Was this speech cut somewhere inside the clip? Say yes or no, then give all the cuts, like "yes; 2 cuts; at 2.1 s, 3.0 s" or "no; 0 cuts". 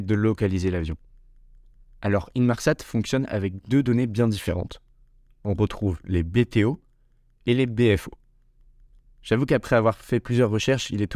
no; 0 cuts